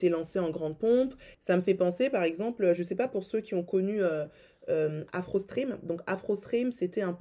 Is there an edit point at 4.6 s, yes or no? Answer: no